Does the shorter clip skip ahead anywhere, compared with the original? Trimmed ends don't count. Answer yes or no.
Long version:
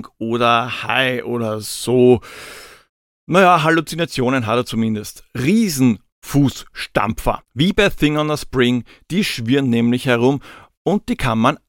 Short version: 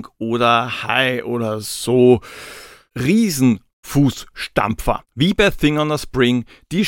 yes